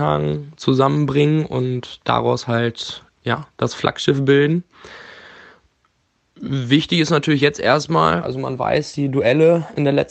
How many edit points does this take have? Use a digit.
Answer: 1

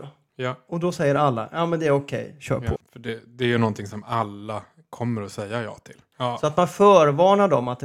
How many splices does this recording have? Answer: 2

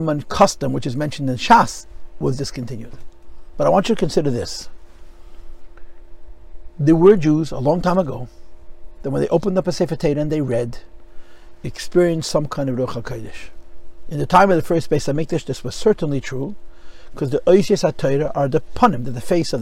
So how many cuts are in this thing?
0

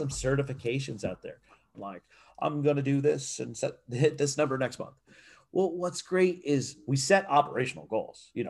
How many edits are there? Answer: 1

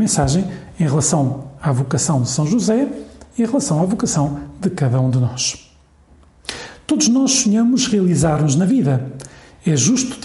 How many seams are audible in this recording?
0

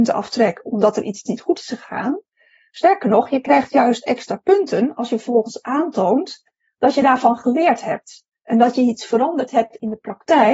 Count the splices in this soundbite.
0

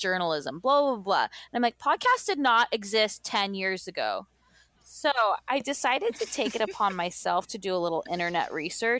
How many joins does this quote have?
0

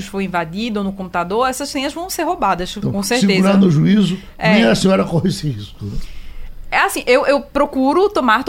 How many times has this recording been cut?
0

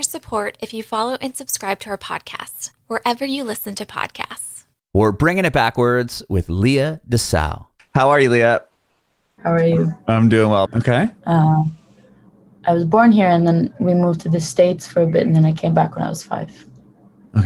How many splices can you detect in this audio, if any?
2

